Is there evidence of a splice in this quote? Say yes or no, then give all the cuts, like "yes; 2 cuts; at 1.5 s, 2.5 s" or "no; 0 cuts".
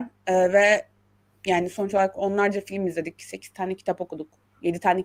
no; 0 cuts